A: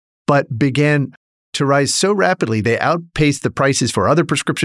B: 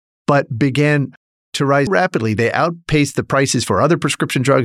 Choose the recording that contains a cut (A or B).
B